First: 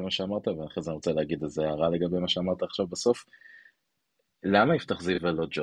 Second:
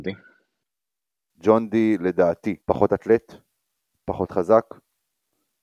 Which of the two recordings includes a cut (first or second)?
second